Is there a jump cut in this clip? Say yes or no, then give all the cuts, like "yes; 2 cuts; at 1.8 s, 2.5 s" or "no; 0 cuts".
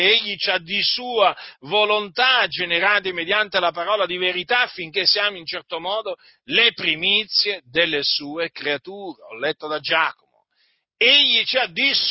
no; 0 cuts